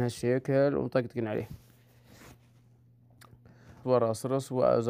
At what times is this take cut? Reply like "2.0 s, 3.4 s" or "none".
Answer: 3.8 s